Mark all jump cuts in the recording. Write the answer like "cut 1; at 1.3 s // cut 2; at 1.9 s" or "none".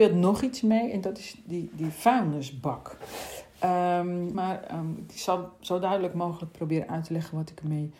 cut 1; at 4.3 s